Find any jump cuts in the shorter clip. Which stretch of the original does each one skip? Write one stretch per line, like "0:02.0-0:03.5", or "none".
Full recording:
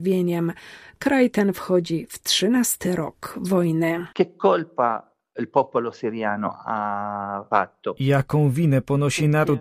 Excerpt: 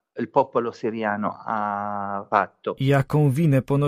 none